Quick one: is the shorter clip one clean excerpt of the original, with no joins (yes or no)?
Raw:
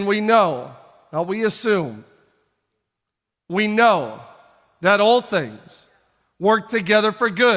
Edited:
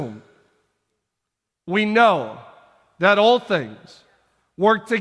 yes